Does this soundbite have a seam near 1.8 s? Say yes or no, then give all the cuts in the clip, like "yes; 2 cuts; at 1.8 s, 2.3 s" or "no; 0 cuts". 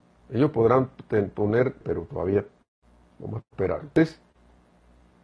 yes; 1 cut; at 1.8 s